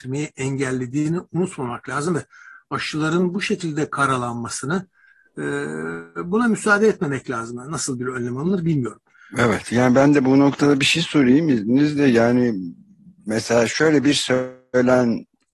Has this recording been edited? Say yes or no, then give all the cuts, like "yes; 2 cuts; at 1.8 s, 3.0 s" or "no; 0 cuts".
no; 0 cuts